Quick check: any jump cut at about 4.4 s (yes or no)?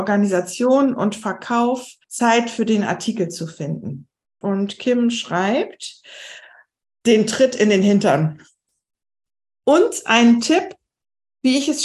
yes